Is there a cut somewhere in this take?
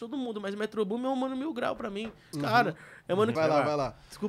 yes; 2 cuts; at 2.3 s, 3.4 s

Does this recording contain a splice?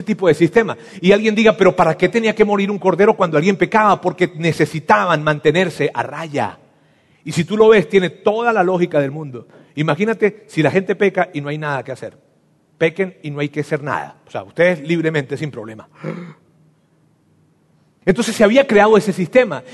no; 0 cuts

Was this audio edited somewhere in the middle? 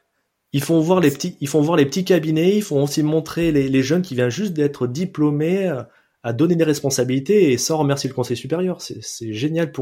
no; 0 cuts

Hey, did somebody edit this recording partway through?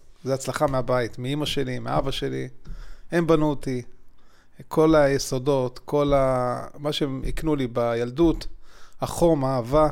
no; 0 cuts

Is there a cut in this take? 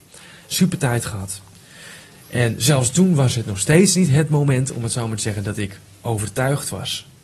yes; 1 cut; at 6.0 s

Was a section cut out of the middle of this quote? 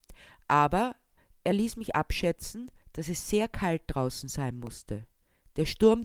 no; 0 cuts

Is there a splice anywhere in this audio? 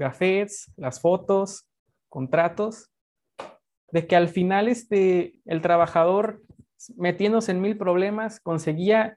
yes; 1 cut; at 5.4 s

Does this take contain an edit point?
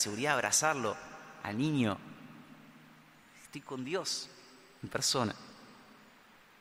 no; 0 cuts

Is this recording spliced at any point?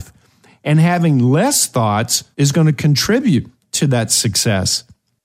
yes; 1 cut; at 2.3 s

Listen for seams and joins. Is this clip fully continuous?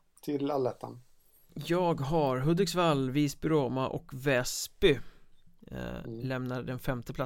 yes; 0 cuts

